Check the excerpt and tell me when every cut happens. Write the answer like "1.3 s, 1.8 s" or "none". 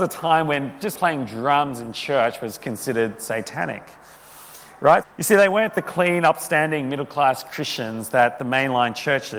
0.9 s, 5.0 s